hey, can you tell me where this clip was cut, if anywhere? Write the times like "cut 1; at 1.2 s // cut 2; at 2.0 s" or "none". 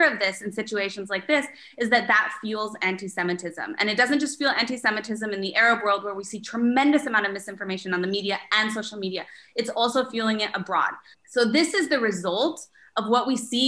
cut 1; at 11.1 s